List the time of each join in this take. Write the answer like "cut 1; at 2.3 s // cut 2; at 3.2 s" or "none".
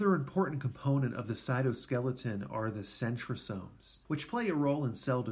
cut 1; at 4.0 s